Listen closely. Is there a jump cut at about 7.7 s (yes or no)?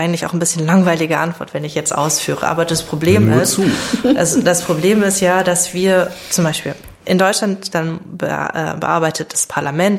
yes